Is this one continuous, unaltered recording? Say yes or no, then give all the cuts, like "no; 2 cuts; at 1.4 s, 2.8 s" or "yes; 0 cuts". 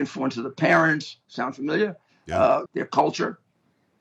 no; 1 cut; at 2.7 s